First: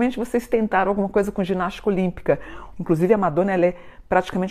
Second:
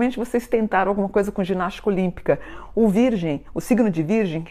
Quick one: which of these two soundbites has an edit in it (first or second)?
first